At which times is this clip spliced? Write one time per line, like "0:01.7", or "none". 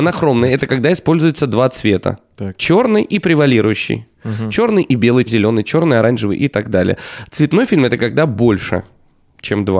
0:05.3